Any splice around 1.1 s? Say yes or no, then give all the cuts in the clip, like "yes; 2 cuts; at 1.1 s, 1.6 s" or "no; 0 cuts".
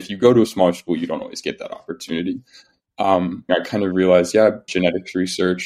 no; 2 cuts; at 3.5 s, 4.7 s